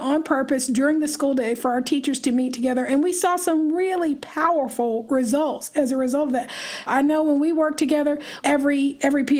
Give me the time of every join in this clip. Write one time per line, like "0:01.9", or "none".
0:06.9
0:08.4

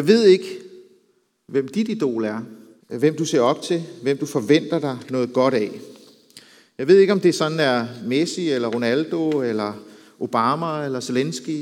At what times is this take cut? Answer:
0:02.8

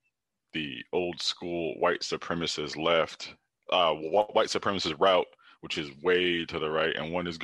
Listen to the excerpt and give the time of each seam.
none

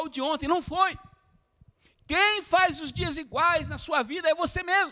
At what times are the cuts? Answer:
none

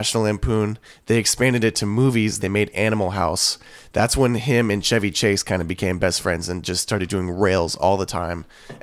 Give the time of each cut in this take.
0:02.4

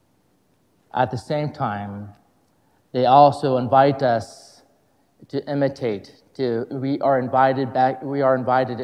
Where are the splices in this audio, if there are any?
none

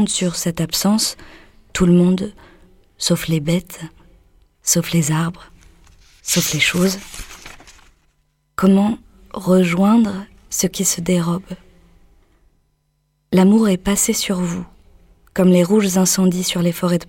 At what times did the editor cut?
none

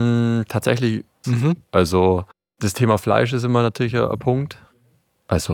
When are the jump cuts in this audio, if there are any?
0:01.2

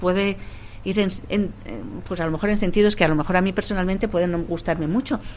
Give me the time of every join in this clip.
none

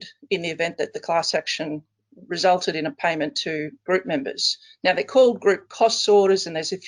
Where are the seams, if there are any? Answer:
0:04.8

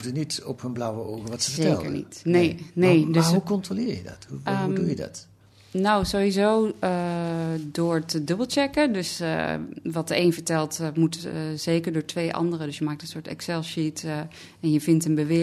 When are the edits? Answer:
none

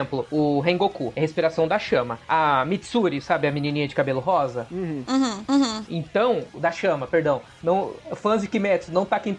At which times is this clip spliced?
0:05.5
0:06.5

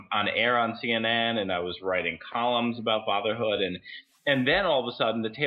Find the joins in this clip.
none

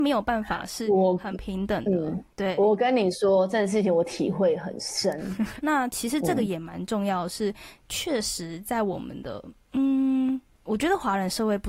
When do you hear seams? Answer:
0:05.6

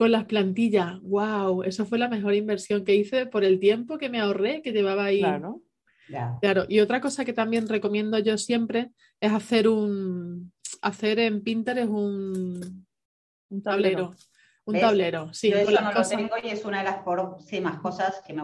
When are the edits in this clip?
none

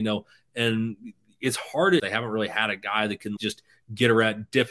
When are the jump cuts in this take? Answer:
0:02.0
0:03.4

